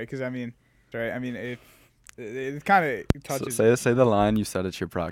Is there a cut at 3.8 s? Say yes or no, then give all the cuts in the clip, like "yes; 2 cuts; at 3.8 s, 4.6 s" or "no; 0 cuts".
no; 1 cut; at 0.9 s